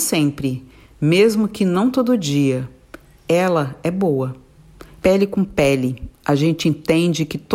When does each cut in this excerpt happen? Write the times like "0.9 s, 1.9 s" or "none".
5.0 s